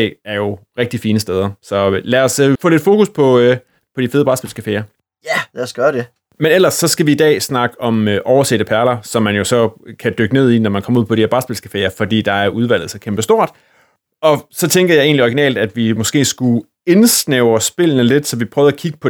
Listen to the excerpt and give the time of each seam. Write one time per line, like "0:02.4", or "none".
0:02.6